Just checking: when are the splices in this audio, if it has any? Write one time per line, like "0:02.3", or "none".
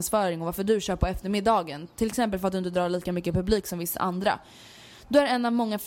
none

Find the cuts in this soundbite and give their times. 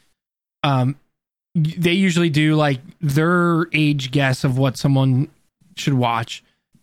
none

